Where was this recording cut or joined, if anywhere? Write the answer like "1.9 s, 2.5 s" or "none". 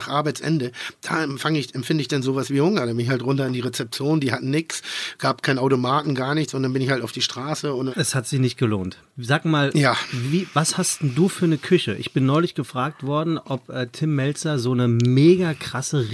7.9 s, 9.1 s